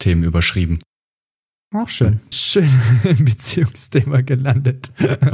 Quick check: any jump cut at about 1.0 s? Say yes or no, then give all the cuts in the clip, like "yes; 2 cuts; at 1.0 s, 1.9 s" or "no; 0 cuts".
no; 1 cut; at 2.3 s